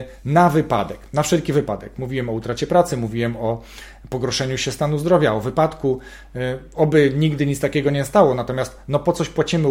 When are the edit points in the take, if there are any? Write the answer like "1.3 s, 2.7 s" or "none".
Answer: none